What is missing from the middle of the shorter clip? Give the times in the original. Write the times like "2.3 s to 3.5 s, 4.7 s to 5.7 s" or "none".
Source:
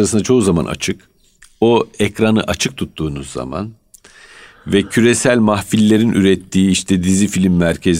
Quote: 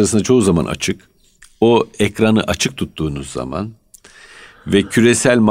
none